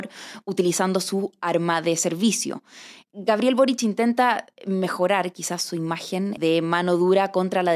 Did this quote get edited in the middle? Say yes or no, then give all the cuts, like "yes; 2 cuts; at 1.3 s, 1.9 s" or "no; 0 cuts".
no; 0 cuts